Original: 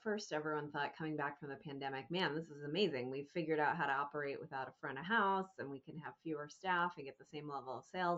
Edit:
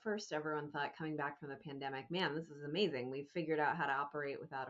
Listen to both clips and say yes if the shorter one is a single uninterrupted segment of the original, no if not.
yes